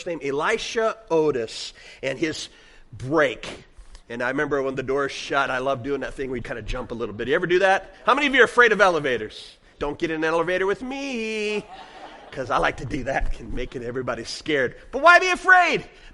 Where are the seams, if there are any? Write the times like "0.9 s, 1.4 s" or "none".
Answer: 6.4 s, 9.7 s